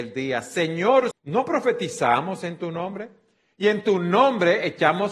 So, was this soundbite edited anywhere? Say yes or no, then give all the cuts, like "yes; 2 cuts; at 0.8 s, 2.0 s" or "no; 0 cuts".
yes; 1 cut; at 1.1 s